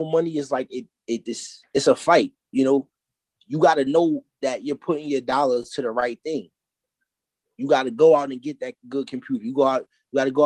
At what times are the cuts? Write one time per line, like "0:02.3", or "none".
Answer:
0:01.3